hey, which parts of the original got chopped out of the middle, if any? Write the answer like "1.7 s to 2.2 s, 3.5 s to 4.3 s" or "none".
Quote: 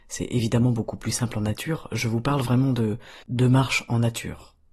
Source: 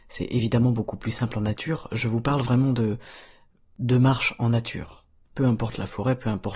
3.2 s to 3.7 s